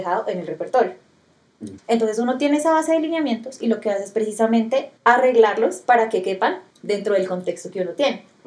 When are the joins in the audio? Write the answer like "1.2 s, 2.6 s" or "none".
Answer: 1.8 s, 5.0 s, 6.7 s